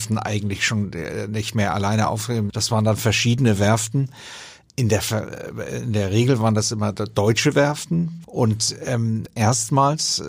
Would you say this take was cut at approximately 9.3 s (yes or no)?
yes